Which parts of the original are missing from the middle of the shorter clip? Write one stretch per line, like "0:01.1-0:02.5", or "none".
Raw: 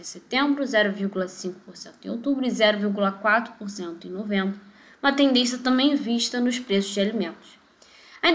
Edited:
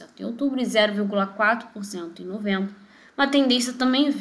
none